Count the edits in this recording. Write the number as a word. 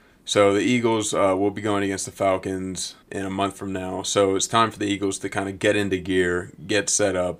one